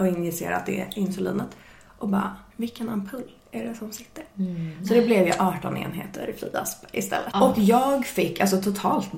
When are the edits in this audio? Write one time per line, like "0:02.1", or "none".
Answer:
0:02.5
0:07.3